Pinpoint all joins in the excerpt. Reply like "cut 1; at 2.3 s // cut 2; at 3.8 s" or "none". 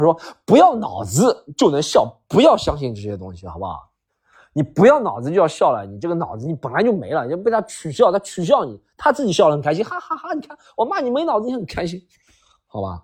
none